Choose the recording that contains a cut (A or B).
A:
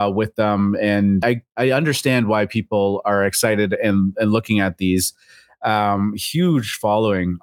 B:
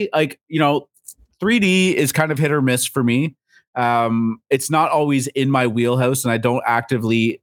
A